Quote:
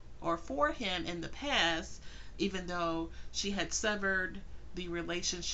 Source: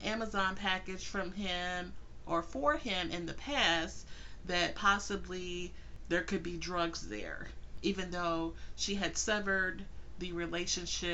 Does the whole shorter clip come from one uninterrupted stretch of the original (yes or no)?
no